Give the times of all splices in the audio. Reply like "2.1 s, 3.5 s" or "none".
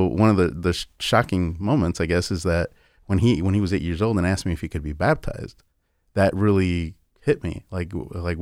none

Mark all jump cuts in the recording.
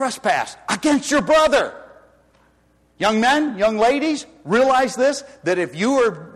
none

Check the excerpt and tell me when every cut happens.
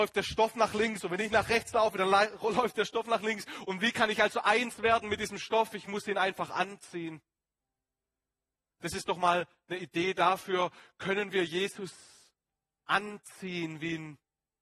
none

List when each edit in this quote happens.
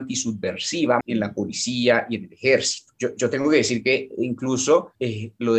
1.0 s

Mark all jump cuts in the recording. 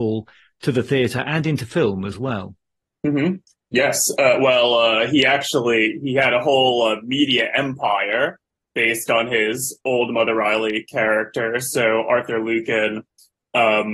none

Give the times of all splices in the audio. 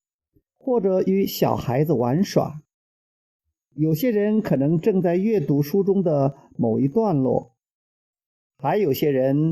none

